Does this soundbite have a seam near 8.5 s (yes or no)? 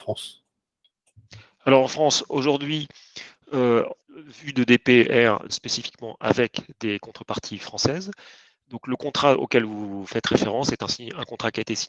no